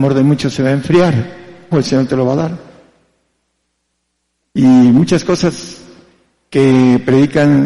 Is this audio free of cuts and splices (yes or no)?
no